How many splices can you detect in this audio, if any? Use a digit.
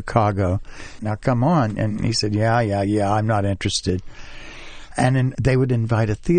2